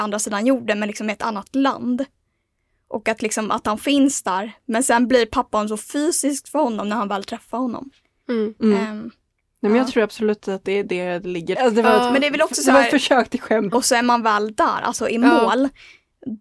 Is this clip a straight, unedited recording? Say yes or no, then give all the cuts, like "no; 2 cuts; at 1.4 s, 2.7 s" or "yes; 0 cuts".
no; 2 cuts; at 11.6 s, 13.7 s